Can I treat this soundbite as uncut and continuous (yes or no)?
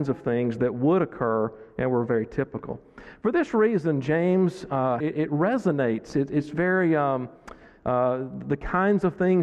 no